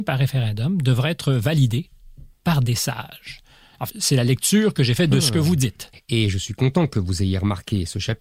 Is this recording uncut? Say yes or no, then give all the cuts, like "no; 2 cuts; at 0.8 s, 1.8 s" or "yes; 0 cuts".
no; 2 cuts; at 3.9 s, 5.9 s